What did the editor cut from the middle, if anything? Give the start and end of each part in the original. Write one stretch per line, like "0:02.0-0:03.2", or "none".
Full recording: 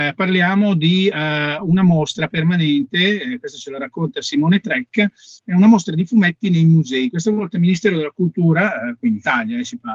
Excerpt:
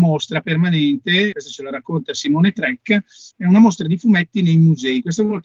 0:03.2-0:03.4